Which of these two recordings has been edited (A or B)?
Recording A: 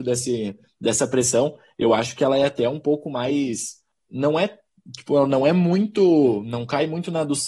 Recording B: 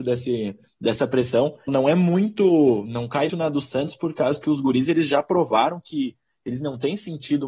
B